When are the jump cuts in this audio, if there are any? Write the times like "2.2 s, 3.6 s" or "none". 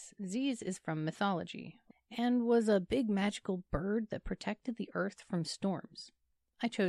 1.9 s